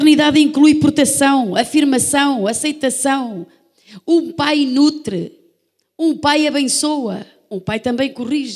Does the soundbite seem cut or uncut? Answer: uncut